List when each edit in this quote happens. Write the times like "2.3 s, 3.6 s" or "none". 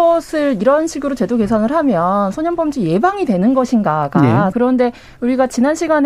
4.5 s